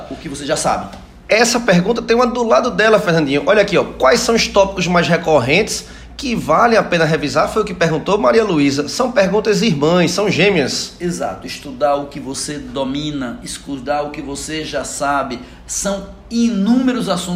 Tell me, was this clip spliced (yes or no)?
no